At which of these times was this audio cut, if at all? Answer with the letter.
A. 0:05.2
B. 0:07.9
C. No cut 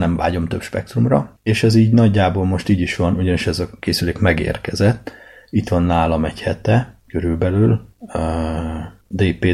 C